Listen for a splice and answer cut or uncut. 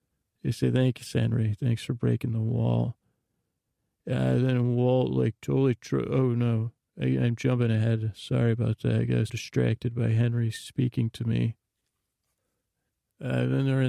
cut